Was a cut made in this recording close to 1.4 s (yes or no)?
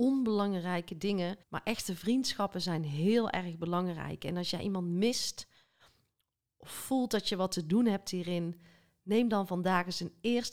yes